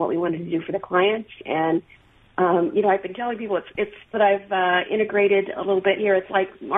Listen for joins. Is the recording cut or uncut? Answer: cut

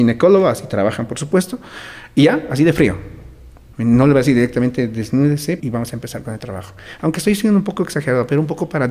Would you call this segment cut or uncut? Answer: cut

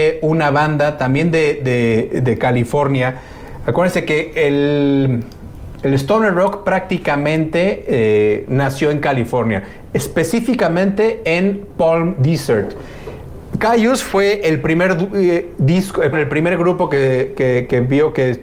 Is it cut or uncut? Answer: cut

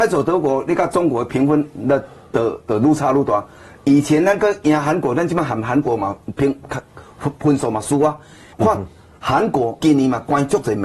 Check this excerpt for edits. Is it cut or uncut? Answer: cut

